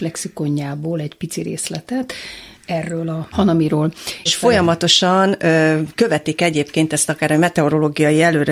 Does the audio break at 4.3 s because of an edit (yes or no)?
yes